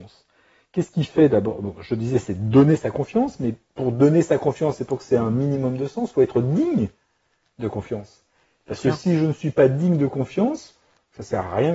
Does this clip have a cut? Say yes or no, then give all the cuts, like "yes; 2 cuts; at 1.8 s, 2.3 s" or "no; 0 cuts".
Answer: no; 0 cuts